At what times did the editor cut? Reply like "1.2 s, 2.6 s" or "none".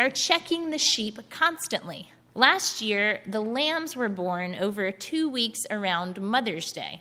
2.3 s